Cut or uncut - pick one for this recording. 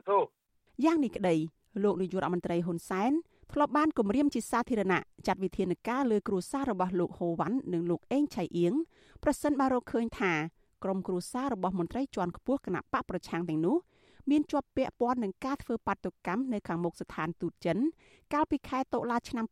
uncut